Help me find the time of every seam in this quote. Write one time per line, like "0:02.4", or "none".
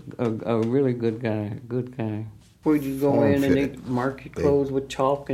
0:02.6